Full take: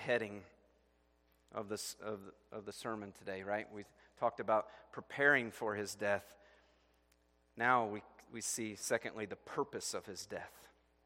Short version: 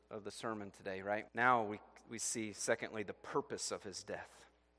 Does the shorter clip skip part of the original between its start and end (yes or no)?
yes